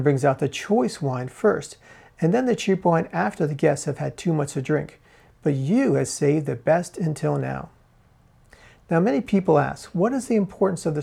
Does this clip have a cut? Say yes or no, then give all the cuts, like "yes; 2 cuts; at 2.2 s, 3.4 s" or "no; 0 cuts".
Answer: no; 0 cuts